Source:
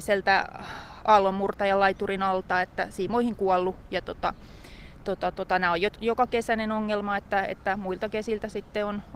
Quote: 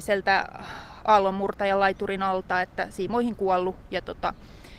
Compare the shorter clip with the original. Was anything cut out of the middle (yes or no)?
no